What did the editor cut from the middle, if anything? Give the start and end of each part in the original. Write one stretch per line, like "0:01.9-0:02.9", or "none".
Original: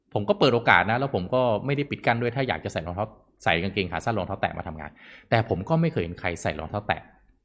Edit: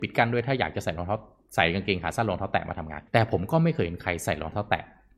0:05.0-0:05.3